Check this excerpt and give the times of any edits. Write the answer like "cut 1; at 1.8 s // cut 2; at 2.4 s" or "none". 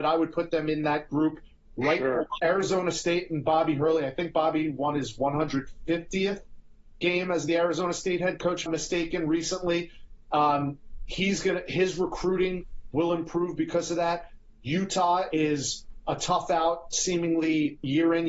cut 1; at 2.4 s // cut 2; at 8.7 s